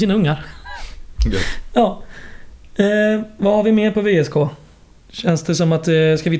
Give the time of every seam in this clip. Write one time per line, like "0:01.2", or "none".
none

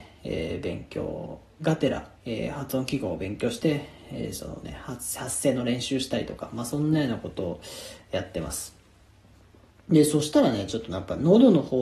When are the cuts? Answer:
0:02.2

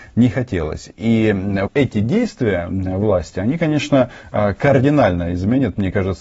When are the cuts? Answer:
0:01.7

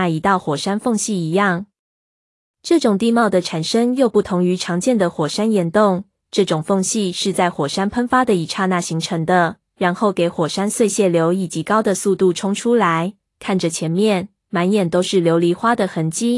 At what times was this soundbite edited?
0:13.3

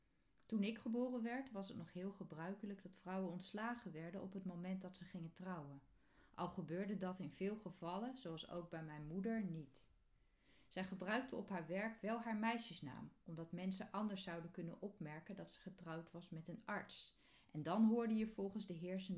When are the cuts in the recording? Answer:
none

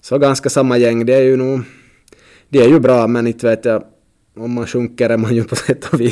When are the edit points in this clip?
none

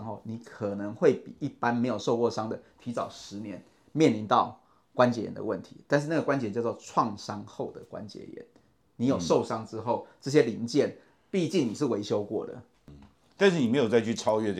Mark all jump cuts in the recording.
0:12.7

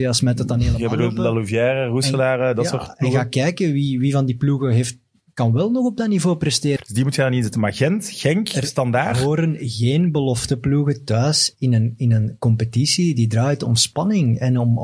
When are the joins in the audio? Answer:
0:06.8

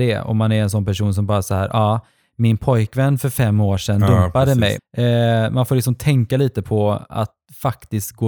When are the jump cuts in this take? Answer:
0:04.8

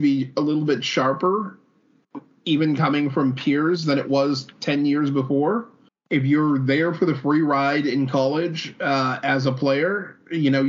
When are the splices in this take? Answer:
0:05.9

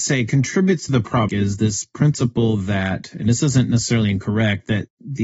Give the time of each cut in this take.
0:01.3

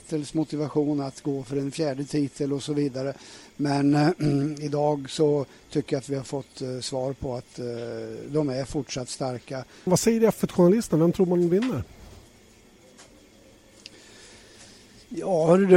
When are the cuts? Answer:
0:09.9

